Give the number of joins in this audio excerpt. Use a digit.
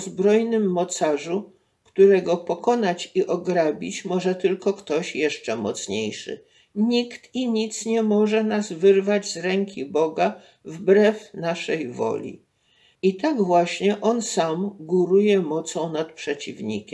2